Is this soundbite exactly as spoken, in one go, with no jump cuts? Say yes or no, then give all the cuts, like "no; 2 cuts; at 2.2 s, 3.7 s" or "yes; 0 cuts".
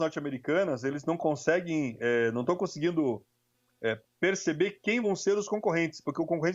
yes; 0 cuts